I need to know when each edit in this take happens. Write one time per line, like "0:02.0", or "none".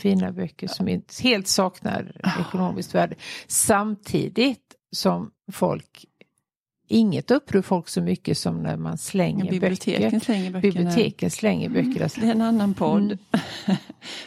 0:12.1